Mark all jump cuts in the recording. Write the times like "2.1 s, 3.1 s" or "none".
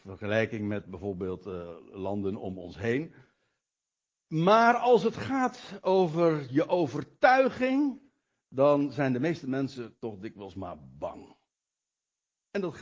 none